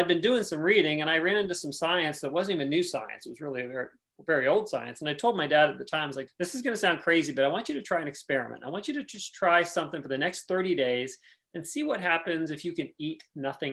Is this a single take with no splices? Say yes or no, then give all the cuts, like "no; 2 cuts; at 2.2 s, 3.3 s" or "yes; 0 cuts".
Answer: no; 1 cut; at 6.3 s